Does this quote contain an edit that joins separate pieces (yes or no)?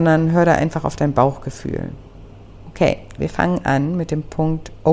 yes